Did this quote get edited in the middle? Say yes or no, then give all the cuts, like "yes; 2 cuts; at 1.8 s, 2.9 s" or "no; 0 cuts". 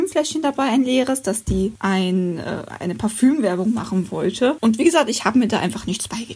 no; 0 cuts